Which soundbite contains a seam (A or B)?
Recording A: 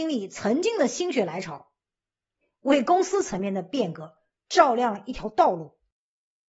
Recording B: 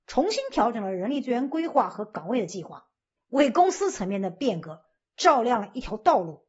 B